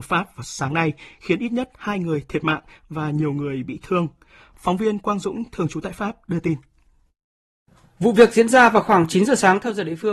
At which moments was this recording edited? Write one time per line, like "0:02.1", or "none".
none